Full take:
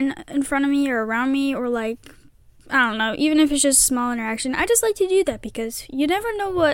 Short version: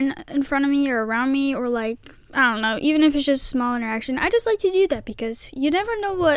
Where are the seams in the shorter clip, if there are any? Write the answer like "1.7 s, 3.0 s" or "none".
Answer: 2.2 s